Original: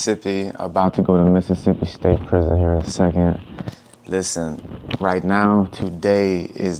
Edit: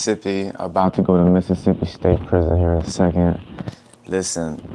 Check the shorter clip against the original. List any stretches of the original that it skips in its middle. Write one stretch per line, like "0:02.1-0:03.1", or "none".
none